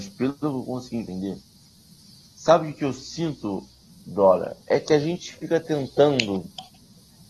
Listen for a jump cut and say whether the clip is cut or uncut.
cut